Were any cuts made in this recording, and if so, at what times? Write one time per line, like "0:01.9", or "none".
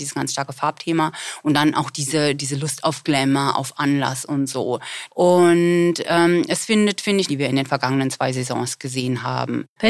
0:05.1
0:07.3